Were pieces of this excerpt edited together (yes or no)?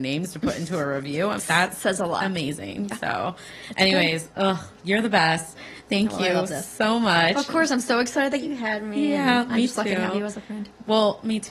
yes